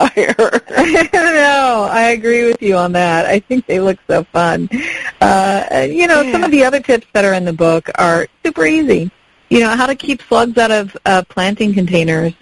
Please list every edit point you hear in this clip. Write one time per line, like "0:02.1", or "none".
none

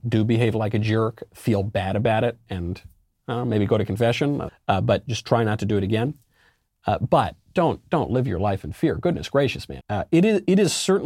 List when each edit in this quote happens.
0:04.5
0:09.8

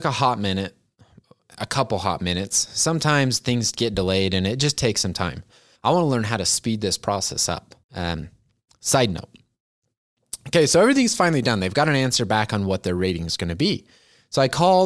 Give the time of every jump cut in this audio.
0:05.8
0:07.8

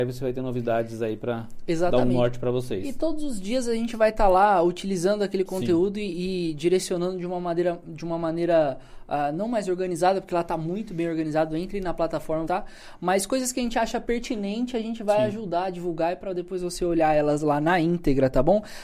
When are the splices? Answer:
0:12.5

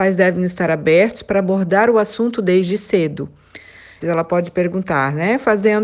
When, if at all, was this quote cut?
0:04.0

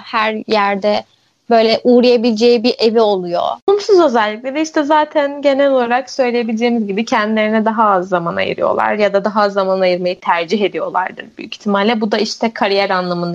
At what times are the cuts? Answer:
none

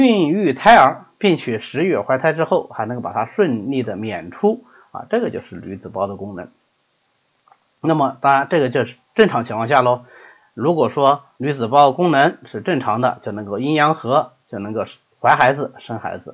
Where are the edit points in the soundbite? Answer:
none

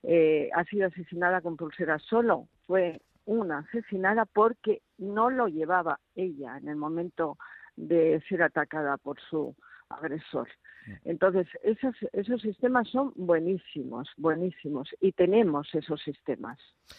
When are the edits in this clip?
none

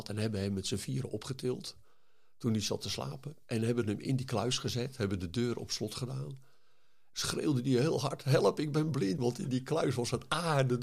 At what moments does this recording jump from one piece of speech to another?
0:07.1
0:09.2

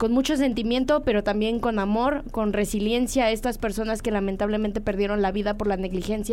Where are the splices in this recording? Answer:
none

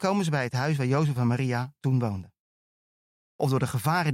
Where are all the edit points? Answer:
0:03.2

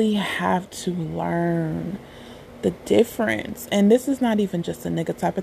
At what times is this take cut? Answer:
none

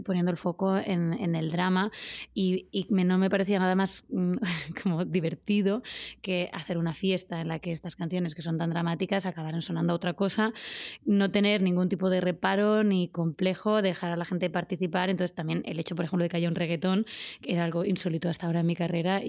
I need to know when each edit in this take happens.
none

